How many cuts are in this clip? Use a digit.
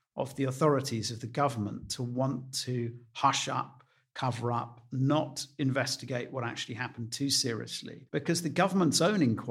1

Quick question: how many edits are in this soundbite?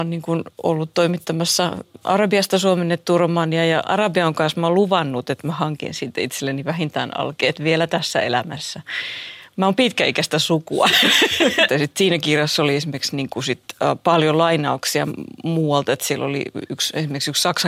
1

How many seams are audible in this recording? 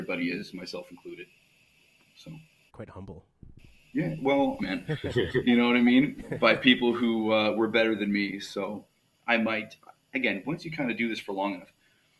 2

